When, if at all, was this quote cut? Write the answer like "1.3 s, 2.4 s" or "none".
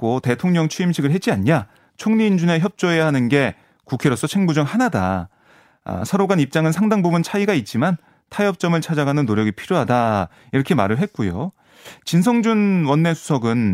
none